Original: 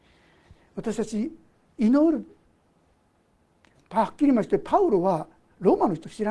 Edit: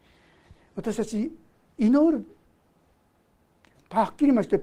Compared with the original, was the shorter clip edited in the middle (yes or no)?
no